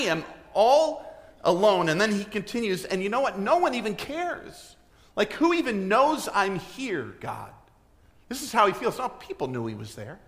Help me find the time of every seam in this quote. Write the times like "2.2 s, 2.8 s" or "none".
none